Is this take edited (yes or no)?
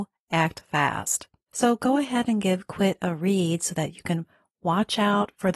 yes